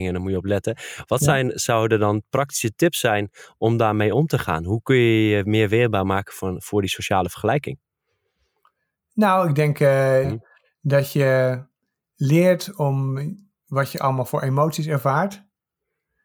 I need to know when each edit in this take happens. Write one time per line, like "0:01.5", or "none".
0:10.2